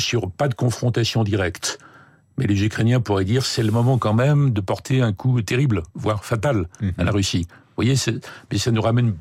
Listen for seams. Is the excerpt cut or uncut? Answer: uncut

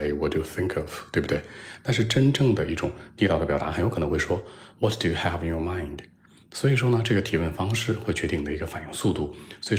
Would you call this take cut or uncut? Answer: uncut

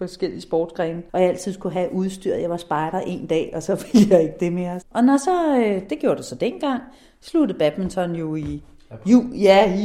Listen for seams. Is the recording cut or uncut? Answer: cut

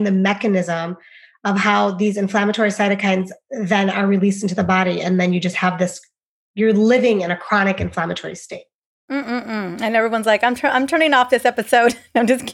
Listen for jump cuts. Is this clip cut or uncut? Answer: uncut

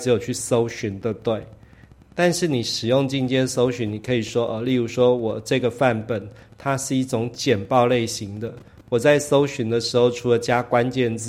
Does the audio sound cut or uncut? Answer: uncut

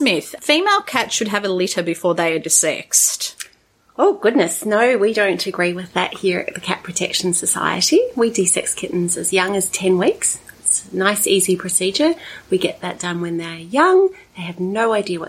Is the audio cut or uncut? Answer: uncut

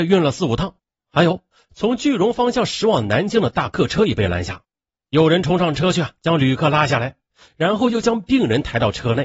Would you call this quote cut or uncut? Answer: uncut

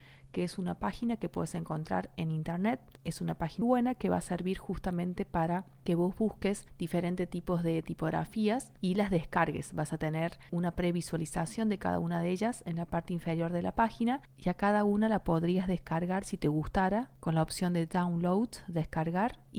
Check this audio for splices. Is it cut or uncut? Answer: cut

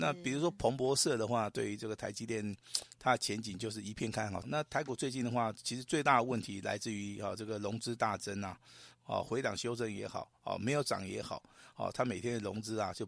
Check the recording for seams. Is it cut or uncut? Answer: cut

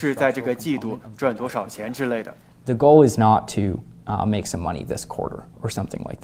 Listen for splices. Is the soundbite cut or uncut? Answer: uncut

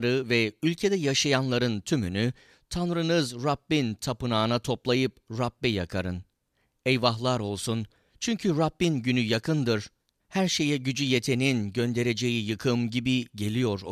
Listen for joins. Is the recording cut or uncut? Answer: uncut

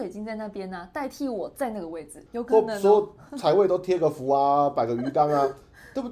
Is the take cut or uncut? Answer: cut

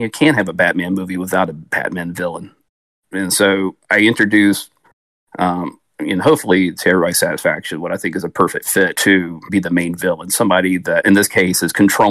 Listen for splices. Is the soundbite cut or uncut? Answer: uncut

